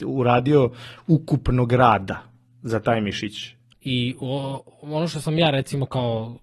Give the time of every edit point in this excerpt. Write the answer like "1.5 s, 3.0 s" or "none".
3.7 s